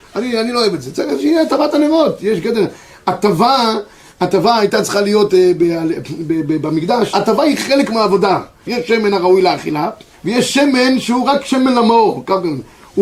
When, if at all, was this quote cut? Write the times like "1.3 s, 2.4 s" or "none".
7.1 s, 8.7 s, 10.1 s